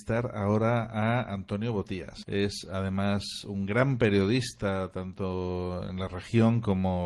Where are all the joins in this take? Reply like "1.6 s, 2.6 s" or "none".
2.2 s